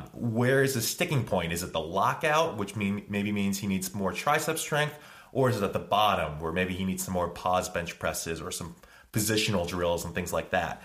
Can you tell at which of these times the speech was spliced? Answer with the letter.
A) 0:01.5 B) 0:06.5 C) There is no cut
C